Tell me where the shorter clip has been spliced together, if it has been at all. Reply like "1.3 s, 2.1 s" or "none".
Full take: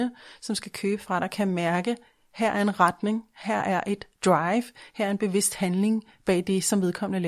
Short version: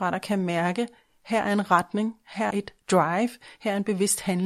2.5 s